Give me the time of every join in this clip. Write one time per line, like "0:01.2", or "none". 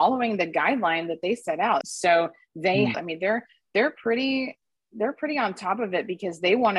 0:01.8
0:02.9